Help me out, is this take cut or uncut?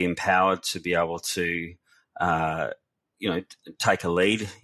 uncut